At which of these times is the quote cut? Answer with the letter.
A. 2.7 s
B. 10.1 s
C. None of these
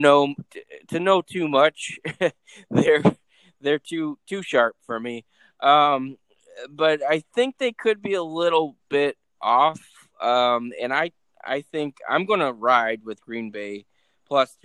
C